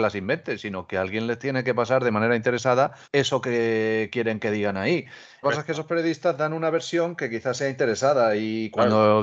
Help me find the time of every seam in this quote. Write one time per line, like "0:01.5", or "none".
0:03.0
0:05.4